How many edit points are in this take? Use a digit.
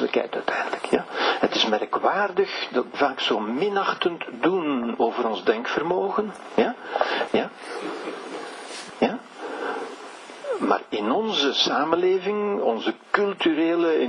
3